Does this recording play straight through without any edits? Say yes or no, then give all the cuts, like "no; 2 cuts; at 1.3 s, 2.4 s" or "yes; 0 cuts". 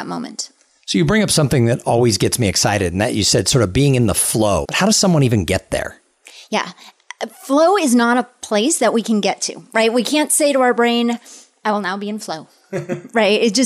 no; 1 cut; at 4.6 s